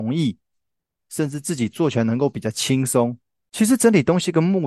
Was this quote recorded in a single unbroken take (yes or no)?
no